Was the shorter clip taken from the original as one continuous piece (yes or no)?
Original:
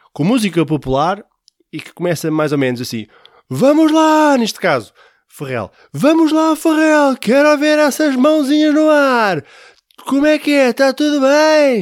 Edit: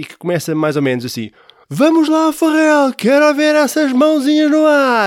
no